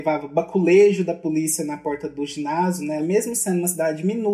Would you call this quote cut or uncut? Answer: cut